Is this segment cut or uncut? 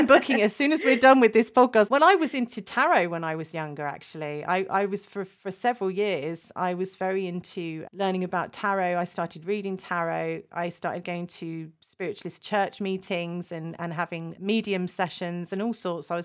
cut